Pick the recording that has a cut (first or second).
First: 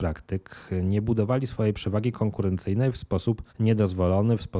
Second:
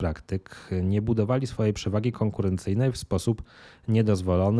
first